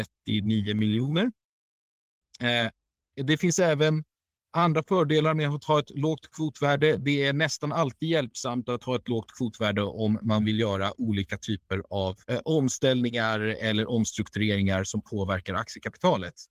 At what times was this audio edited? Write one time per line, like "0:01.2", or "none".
0:03.1
0:12.2